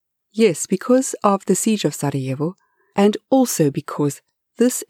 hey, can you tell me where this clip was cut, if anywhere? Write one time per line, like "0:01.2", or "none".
0:02.9